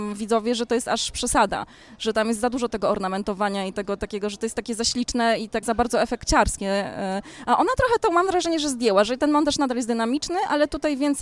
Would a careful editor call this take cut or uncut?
cut